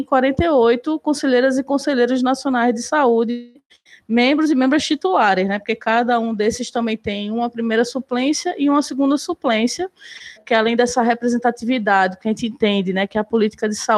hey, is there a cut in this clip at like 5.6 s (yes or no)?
no